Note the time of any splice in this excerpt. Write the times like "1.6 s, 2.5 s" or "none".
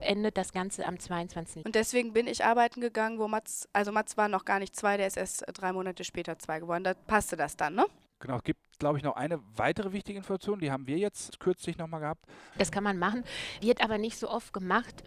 1.6 s, 8.1 s, 12.5 s

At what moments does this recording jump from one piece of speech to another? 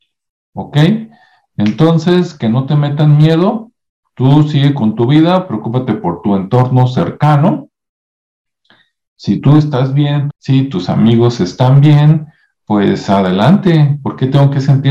10.3 s

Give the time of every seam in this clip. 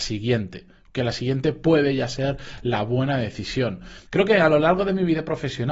4.1 s

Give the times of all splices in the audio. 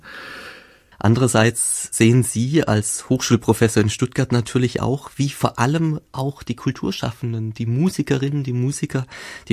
0.9 s

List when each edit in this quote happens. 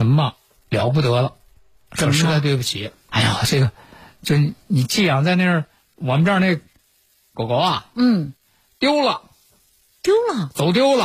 3.1 s

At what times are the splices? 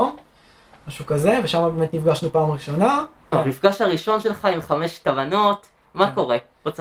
3.3 s

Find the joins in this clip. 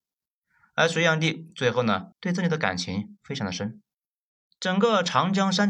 2.1 s

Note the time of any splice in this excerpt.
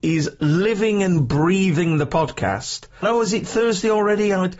3.0 s

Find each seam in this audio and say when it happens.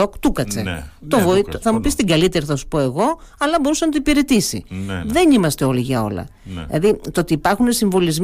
1.6 s

